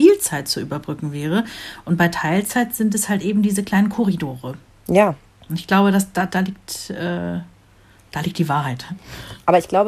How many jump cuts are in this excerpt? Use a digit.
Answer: 1